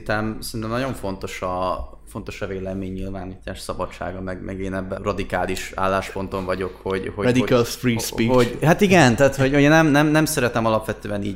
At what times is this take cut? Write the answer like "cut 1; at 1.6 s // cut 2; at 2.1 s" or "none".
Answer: cut 1; at 5.0 s

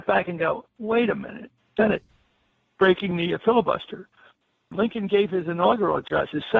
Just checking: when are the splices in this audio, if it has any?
cut 1; at 1.8 s // cut 2; at 4.7 s

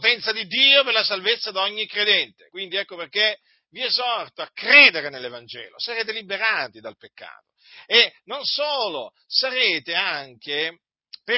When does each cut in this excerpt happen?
none

